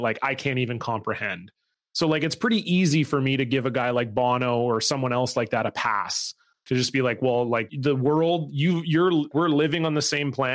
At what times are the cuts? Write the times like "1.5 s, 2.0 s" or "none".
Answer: 7.7 s, 9.3 s